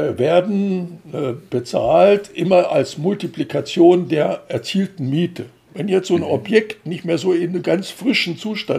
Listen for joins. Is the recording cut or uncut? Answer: uncut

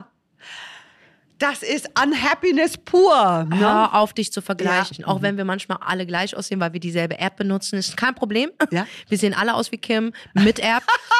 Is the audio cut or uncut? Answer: uncut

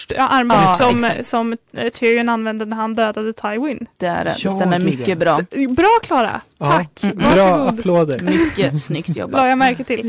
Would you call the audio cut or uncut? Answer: uncut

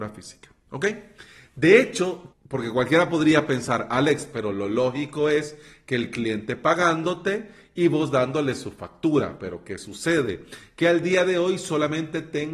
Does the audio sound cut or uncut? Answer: cut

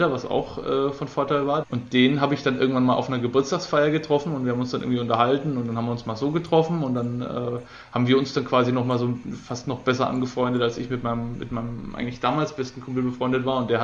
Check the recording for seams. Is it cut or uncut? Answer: cut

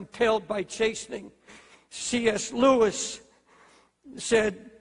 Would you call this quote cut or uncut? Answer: uncut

